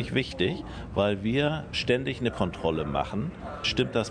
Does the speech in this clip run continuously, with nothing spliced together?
yes; 0 cuts

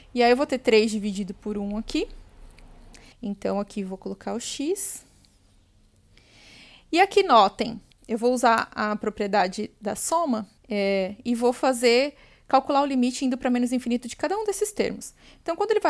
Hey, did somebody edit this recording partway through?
yes; 3 cuts; at 3.1 s, 7.9 s, 10.6 s

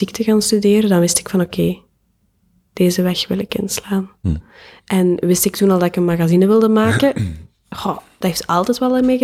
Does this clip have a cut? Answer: no; 0 cuts

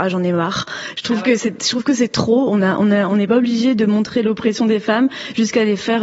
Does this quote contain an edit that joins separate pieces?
no; 0 cuts

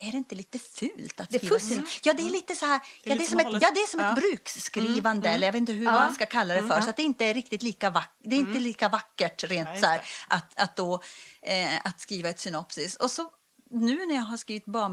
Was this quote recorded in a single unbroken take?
no; 1 cut; at 3.6 s

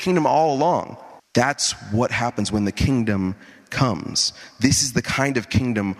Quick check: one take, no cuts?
no; 1 cut; at 1.2 s

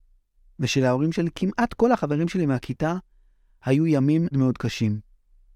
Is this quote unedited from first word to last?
no; 1 cut; at 4.3 s

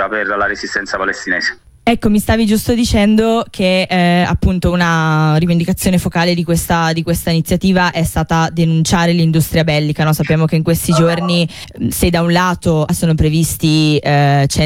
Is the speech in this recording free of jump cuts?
yes; 0 cuts

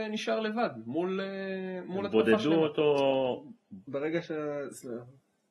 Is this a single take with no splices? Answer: no; 1 cut; at 3.9 s

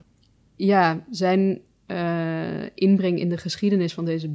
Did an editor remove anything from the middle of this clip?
no; 0 cuts

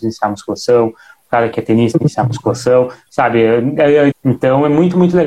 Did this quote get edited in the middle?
yes; 1 cut; at 4.1 s

